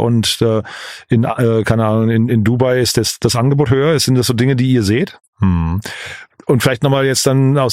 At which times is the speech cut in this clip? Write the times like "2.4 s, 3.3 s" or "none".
5.2 s